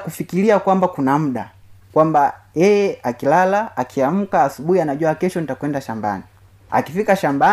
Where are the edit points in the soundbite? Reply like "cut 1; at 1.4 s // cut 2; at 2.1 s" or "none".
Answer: none